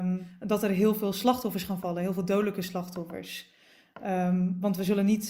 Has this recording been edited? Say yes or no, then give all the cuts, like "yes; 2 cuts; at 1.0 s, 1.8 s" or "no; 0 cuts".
no; 0 cuts